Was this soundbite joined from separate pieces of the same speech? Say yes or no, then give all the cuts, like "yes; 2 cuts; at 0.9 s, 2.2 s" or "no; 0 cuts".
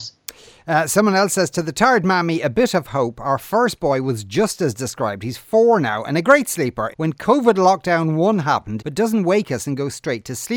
yes; 2 cuts; at 6.9 s, 8.8 s